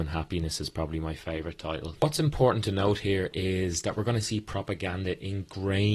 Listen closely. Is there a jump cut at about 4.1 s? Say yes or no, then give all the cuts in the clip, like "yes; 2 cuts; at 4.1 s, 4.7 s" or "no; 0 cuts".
no; 1 cut; at 2.0 s